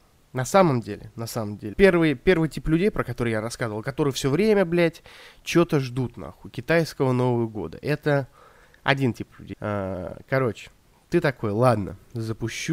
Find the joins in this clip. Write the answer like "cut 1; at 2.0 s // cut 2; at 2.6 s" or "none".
cut 1; at 1.7 s // cut 2; at 9.5 s